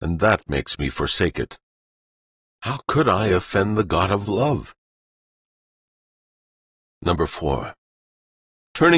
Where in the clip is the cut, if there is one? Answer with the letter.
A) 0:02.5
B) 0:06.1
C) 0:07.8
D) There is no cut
D